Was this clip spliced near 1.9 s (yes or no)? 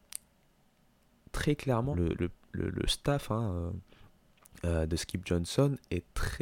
yes